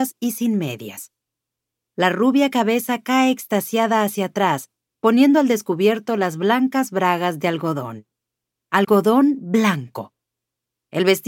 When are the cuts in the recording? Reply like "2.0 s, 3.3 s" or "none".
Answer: 4.9 s